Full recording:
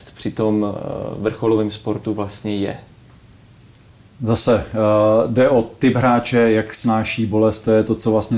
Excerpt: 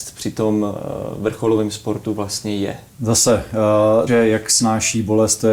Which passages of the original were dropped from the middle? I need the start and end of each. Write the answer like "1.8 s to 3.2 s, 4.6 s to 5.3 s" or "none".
2.9 s to 4.1 s, 5.3 s to 6.3 s